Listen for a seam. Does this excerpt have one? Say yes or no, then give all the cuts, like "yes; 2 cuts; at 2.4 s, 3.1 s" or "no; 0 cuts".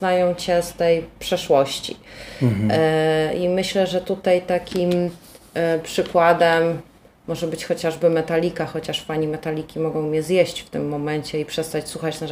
no; 0 cuts